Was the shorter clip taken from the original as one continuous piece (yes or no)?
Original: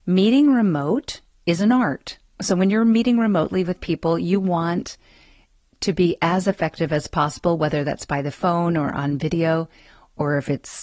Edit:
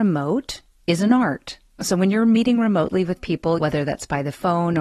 no